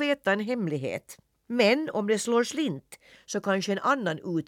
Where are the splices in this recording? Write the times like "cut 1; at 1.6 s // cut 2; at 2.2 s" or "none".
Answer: cut 1; at 1.4 s